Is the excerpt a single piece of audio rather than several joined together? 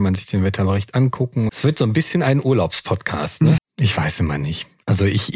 no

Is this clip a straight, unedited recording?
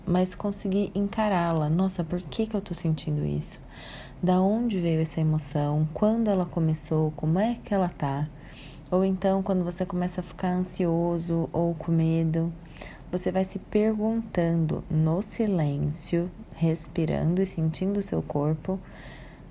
yes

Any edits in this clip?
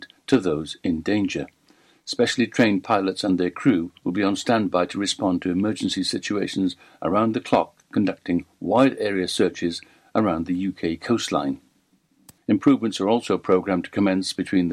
yes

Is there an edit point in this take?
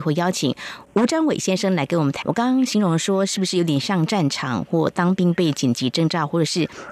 yes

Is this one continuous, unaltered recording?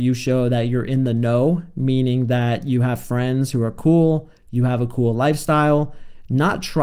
yes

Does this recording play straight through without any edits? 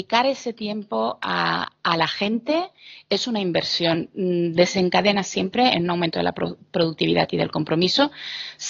yes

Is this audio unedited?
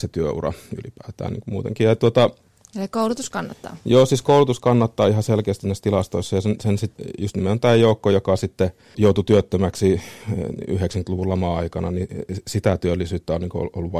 yes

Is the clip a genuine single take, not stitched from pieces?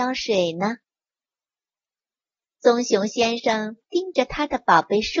yes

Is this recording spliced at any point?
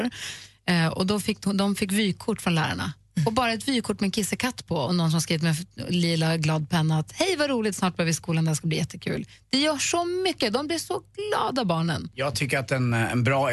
no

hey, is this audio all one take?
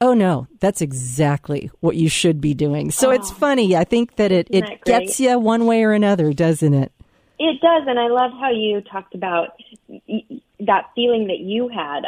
yes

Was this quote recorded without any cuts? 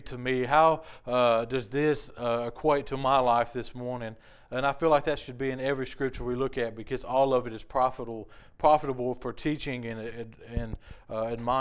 yes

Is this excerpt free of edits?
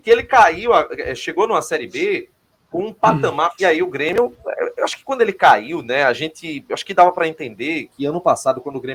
no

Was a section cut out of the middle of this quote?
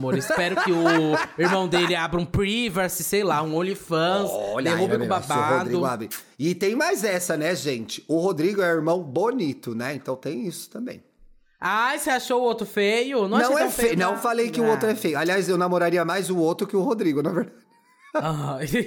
no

